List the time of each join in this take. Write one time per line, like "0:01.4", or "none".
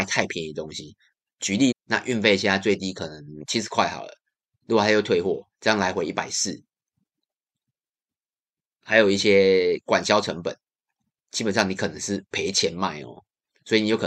0:01.7